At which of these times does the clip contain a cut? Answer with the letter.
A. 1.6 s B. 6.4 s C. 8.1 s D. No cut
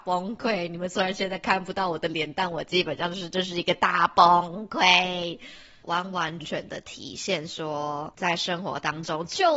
B